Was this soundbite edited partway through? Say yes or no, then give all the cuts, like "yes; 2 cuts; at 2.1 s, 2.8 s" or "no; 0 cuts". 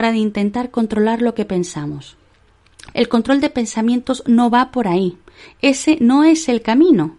yes; 1 cut; at 2.9 s